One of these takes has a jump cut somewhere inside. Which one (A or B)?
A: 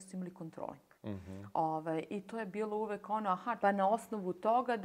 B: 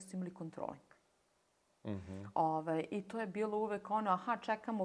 A